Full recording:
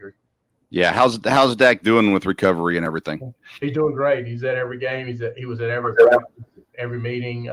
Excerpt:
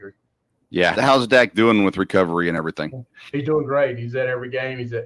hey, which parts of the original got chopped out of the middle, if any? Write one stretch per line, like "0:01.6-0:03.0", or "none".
0:00.9-0:01.2